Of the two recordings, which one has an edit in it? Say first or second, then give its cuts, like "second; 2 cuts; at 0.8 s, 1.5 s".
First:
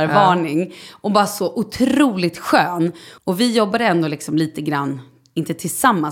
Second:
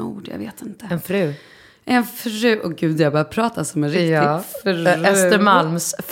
first; 1 cut; at 3.2 s